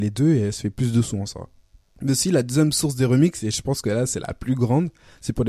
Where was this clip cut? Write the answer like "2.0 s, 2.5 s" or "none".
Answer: none